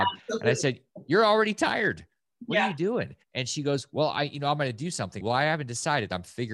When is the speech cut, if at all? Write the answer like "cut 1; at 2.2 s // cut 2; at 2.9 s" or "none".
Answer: cut 1; at 3.2 s // cut 2; at 5.2 s